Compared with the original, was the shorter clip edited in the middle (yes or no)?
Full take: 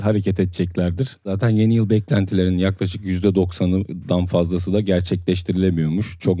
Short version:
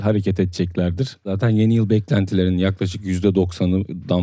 no